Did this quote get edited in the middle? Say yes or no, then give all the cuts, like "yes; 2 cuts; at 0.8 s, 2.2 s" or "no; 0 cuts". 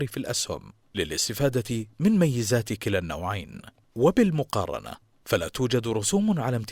yes; 1 cut; at 3.8 s